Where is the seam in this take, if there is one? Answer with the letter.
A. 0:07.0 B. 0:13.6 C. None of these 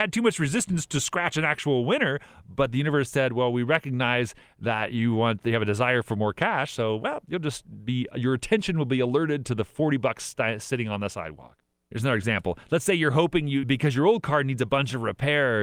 B